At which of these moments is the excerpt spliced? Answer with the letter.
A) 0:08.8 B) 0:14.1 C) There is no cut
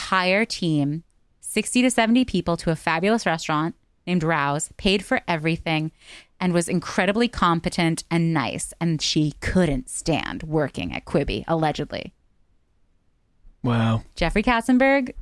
B